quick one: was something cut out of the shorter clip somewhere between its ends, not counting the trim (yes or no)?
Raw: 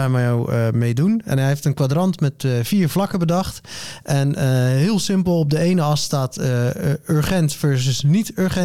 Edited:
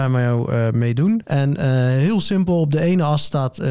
yes